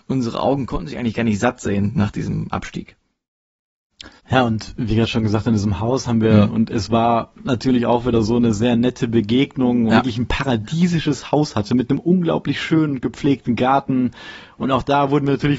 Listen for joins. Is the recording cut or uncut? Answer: cut